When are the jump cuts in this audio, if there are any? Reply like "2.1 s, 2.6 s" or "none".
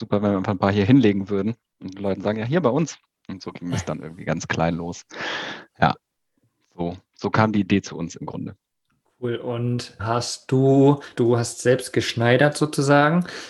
10.0 s, 11.2 s

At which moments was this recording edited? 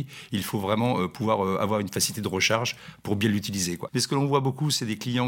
3.9 s

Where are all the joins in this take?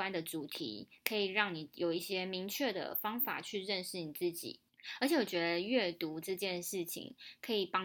none

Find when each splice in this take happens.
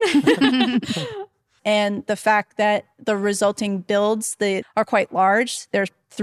1.6 s, 4.6 s

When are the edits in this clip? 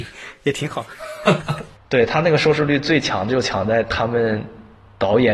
1.8 s

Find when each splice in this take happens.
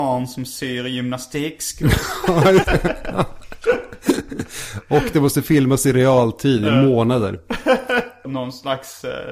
2.6 s, 8.2 s

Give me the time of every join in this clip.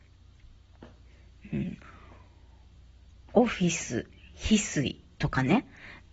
none

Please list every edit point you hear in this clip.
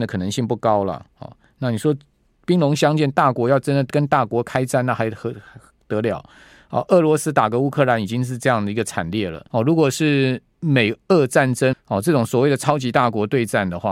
3.9 s, 9.5 s, 11.7 s

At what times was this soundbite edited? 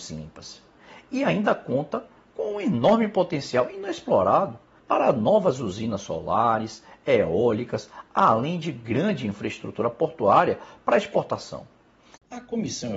4.8 s

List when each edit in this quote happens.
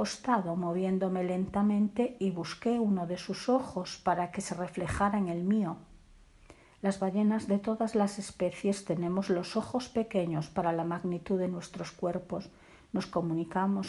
none

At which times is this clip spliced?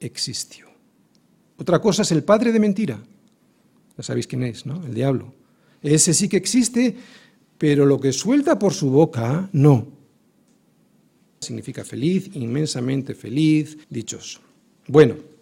11.4 s, 13.8 s

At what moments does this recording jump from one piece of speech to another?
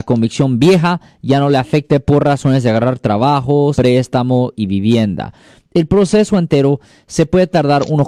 3.7 s

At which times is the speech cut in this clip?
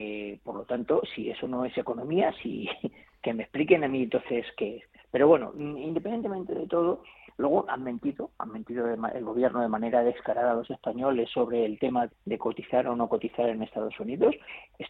12.1 s

